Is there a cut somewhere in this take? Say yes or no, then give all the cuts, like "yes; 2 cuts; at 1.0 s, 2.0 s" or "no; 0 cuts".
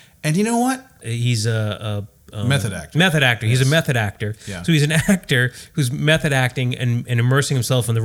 yes; 1 cut; at 1.0 s